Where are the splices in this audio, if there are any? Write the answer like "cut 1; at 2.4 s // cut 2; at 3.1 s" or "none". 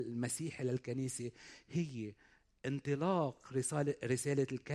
none